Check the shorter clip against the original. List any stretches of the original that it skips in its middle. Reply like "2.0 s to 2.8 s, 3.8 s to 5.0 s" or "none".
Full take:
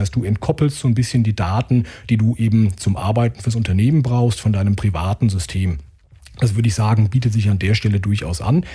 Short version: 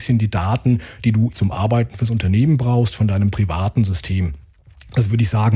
2.4 s to 2.8 s